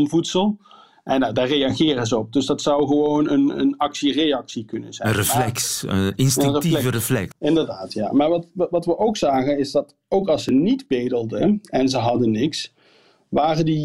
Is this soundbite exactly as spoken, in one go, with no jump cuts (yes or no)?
no